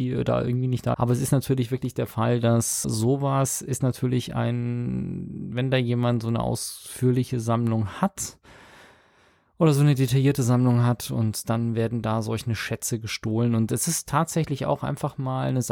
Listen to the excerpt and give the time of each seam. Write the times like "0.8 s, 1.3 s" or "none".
0.9 s, 2.8 s